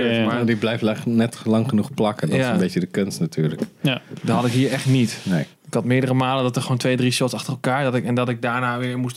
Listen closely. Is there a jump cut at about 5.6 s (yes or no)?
yes